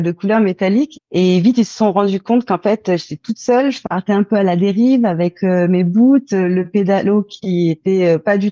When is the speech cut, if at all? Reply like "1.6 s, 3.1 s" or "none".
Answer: 0.9 s